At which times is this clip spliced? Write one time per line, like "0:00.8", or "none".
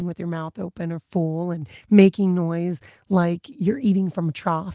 none